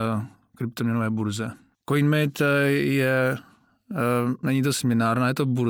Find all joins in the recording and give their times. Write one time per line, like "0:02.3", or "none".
0:01.7
0:04.4

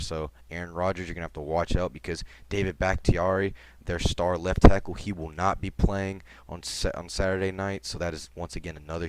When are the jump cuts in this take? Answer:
none

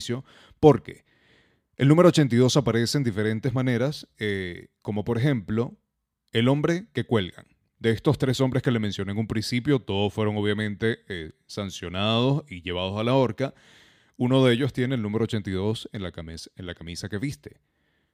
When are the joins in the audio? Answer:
none

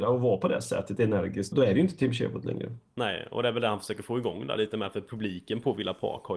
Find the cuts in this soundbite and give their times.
0:01.5

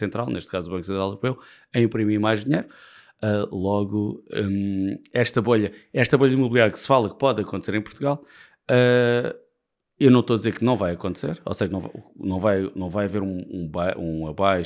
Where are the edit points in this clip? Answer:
none

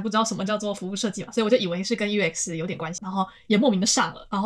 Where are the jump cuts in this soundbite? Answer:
0:03.0

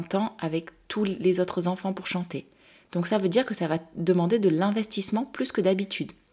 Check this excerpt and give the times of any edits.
none

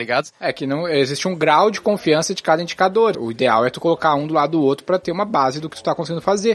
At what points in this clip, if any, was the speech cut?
0:03.1

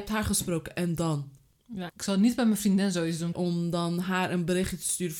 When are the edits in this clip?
0:01.9
0:03.3

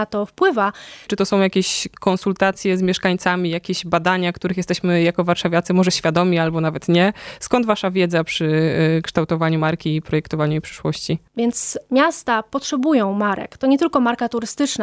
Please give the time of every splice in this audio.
0:01.1
0:11.3

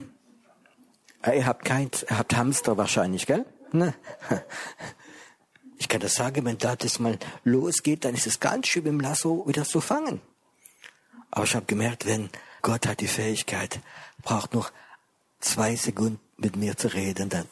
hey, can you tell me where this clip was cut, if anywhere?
0:12.6

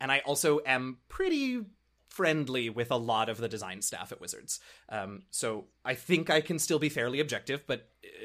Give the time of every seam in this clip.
none

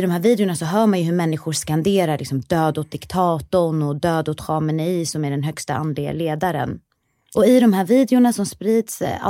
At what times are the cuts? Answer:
0:07.3

